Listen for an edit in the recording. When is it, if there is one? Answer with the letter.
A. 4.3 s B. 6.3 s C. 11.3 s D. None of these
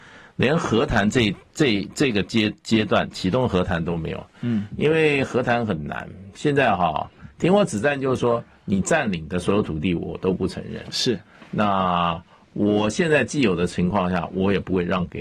D